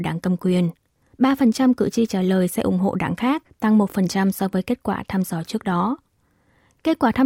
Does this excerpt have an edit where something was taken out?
yes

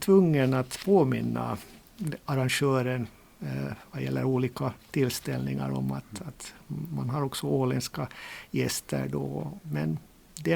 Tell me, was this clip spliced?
yes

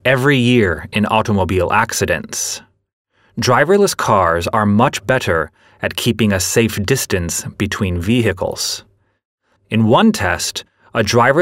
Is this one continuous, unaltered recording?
no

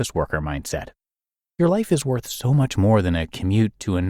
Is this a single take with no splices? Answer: yes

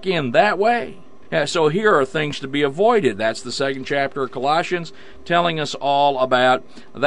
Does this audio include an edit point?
no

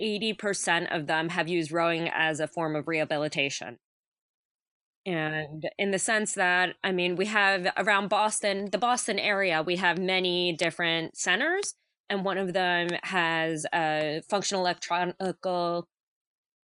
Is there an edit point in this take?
no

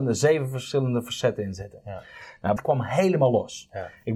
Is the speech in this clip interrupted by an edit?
yes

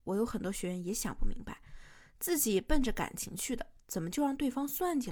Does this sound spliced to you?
no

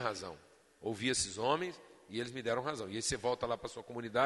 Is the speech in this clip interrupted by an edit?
no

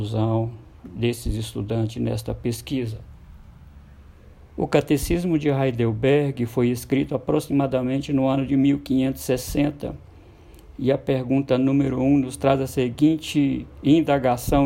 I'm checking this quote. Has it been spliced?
no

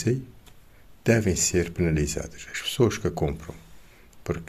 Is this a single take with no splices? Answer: yes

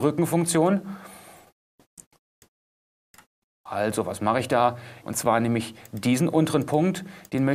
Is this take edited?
yes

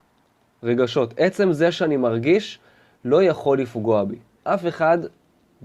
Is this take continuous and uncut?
no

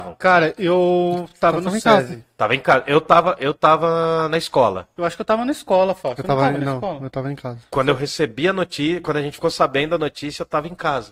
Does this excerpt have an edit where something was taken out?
no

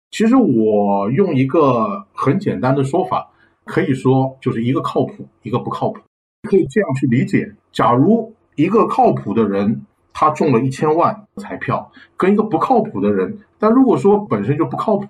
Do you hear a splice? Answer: yes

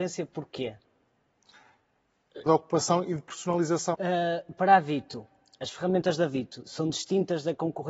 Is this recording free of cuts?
no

